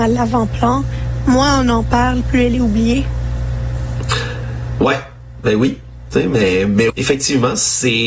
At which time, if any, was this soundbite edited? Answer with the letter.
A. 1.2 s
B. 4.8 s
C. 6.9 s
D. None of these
C